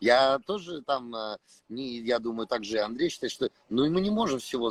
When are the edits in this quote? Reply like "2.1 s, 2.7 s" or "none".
none